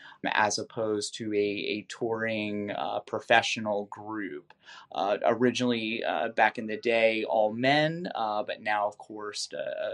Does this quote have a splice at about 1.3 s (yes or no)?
no